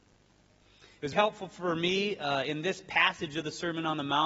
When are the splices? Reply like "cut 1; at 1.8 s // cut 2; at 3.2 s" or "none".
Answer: cut 1; at 1.1 s